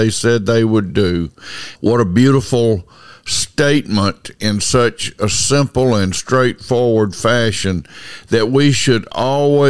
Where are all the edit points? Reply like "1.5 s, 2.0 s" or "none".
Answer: 1.8 s